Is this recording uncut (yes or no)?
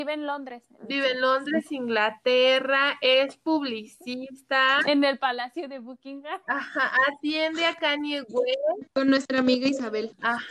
yes